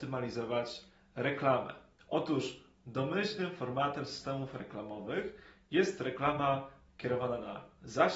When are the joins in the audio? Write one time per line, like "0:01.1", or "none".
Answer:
0:02.0